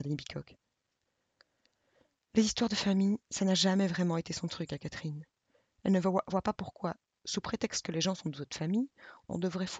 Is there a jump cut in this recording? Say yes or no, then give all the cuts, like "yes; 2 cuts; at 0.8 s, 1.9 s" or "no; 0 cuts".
no; 0 cuts